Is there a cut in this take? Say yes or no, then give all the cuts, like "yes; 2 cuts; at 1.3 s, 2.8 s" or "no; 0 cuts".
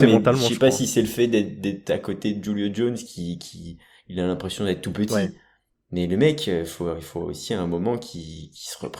no; 0 cuts